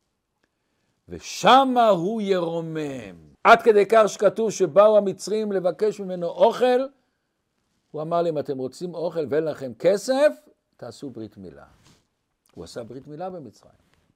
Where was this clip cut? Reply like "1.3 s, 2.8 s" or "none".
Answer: 3.3 s

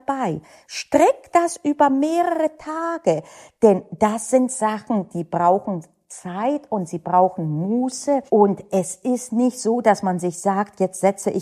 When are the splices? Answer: 8.3 s

